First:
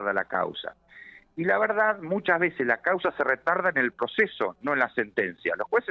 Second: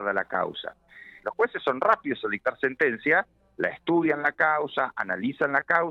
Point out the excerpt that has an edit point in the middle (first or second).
second